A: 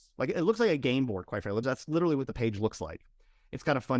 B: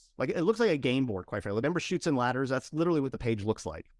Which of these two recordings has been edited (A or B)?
A